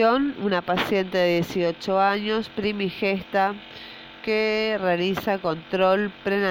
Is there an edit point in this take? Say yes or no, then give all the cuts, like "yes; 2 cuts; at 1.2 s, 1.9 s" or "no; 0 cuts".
no; 0 cuts